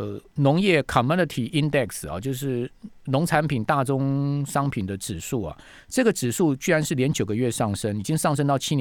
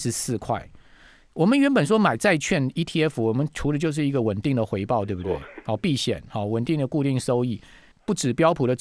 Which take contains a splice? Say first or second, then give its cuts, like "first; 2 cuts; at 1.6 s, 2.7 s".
second; 1 cut; at 7.9 s